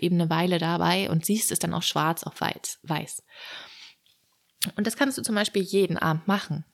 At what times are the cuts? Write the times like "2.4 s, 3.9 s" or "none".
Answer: none